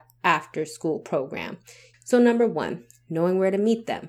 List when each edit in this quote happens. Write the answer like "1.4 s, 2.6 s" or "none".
1.9 s